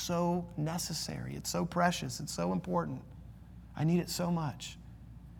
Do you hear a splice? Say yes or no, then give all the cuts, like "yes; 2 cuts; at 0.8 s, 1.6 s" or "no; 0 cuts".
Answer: no; 0 cuts